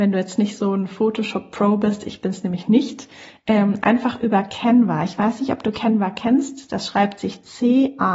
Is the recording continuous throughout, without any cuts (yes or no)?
yes